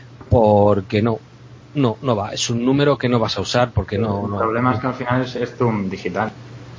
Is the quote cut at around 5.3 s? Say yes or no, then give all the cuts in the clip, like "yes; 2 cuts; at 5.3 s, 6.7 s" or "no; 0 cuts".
no; 0 cuts